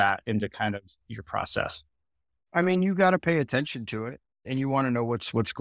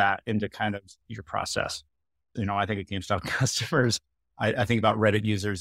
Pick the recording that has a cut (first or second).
second